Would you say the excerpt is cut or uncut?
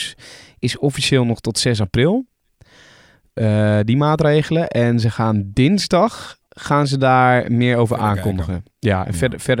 uncut